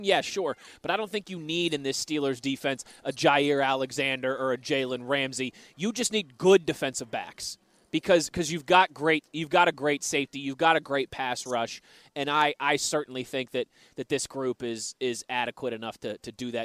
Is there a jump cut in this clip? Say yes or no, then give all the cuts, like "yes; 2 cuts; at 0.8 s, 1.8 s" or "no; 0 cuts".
no; 0 cuts